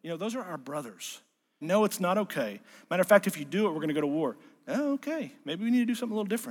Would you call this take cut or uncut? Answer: cut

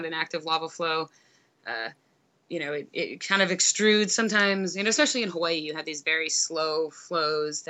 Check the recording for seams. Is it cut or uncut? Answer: uncut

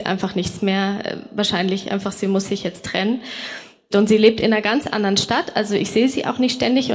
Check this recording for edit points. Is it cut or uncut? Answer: cut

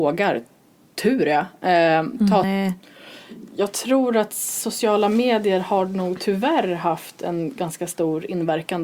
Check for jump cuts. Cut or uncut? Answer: cut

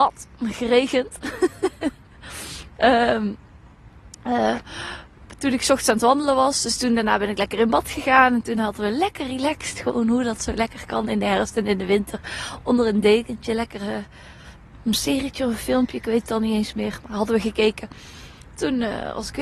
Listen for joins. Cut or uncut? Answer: uncut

